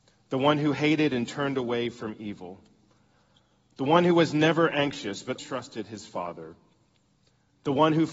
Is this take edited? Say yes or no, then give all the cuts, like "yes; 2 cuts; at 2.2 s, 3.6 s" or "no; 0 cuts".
yes; 1 cut; at 5.4 s